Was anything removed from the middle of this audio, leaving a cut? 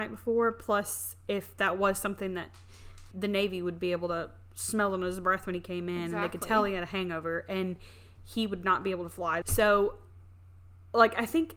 yes; 2 cuts; at 3.1 s, 9.4 s

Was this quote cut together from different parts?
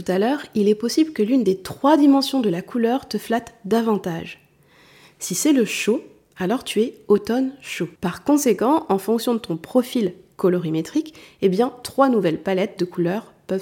yes; 1 cut; at 8.0 s

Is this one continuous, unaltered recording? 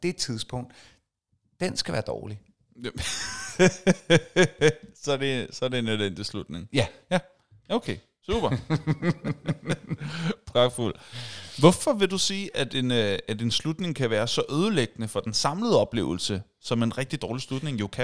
yes; 0 cuts

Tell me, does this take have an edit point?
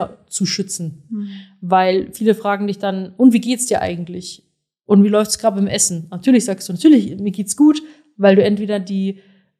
no; 0 cuts

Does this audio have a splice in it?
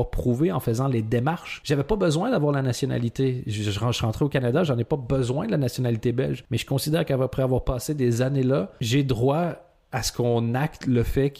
no; 0 cuts

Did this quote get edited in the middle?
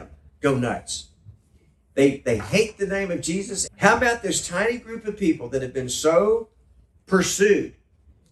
yes; 1 cut; at 3.7 s

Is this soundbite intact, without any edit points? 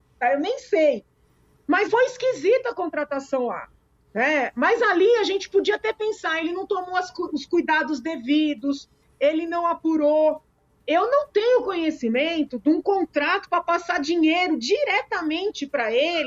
no; 1 cut; at 1.9 s

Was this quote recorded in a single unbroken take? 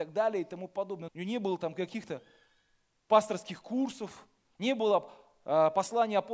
no; 2 cuts; at 1.1 s, 4.5 s

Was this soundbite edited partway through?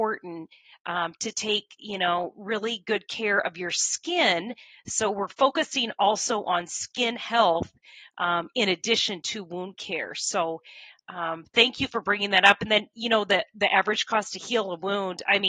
no; 0 cuts

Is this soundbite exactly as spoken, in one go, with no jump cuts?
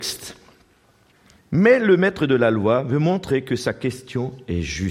no; 1 cut; at 1.4 s

